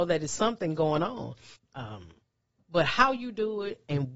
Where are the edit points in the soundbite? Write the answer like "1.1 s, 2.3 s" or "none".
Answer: 1.5 s

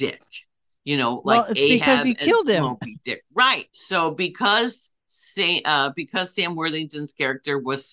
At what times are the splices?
3.7 s

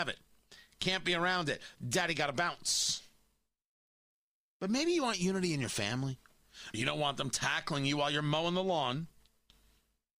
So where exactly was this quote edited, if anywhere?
6.7 s

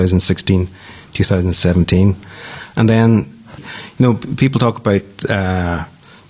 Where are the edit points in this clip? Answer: 3.6 s

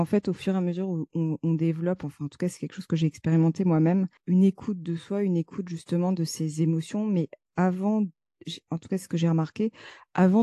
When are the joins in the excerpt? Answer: 4.2 s

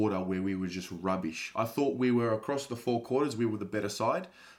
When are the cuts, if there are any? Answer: none

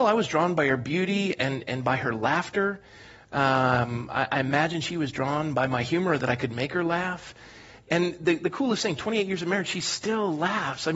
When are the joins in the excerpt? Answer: none

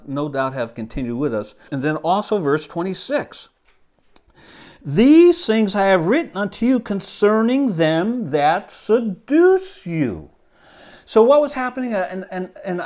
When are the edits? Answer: 1.7 s

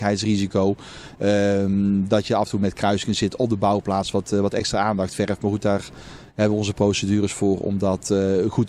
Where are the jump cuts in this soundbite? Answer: none

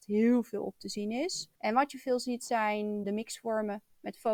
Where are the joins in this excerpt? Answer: 1.6 s

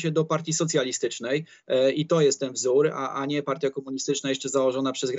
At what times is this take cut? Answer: none

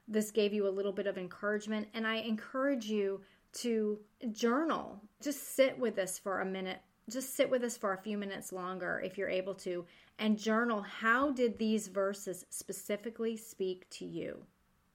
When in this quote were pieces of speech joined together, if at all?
5.2 s

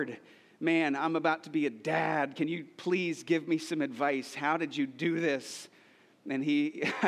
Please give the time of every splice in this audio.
none

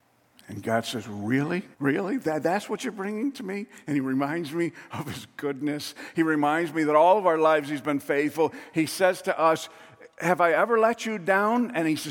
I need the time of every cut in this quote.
1.7 s

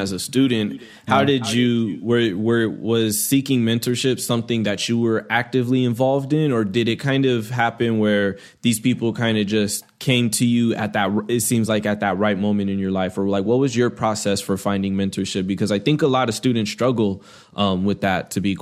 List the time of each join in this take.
none

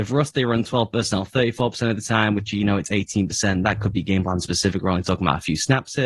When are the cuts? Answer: none

